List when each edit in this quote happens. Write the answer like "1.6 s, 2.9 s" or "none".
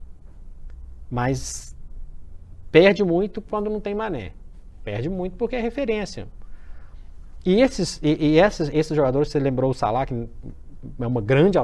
none